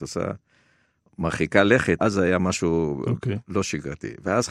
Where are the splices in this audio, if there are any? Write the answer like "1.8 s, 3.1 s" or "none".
2.0 s